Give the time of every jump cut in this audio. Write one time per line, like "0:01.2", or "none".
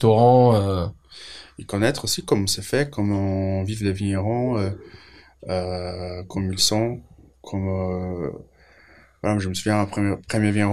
none